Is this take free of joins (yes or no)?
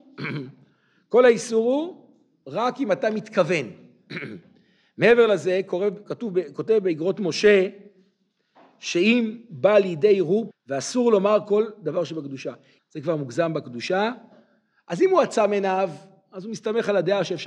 no